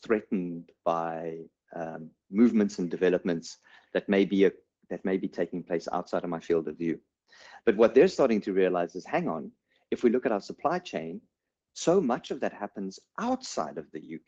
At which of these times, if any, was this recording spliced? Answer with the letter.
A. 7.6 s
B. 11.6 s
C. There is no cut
A